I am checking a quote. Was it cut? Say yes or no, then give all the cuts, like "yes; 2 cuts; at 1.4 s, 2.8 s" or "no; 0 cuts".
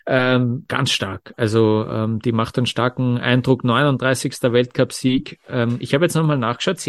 no; 0 cuts